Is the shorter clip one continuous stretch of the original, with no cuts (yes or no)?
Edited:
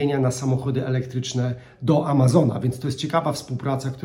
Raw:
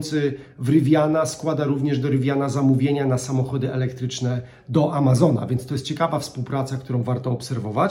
yes